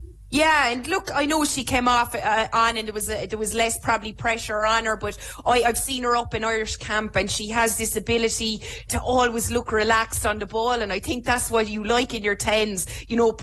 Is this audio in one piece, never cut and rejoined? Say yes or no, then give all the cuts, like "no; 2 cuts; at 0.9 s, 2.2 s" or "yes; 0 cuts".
no; 1 cut; at 8.9 s